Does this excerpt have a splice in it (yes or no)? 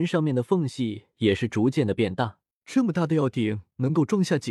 yes